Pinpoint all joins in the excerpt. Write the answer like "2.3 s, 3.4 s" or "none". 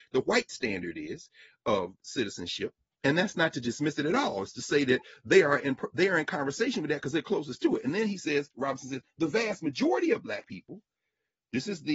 none

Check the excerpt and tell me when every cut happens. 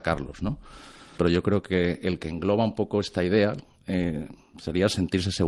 1.2 s

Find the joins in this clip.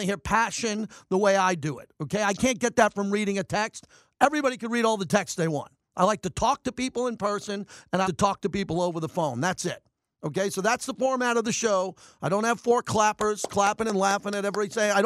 8.0 s

